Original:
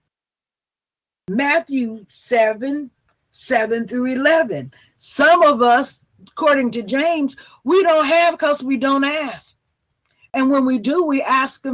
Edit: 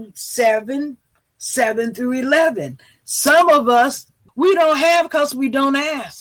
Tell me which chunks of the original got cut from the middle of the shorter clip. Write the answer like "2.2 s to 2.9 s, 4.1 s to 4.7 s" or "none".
6.2 s to 7.6 s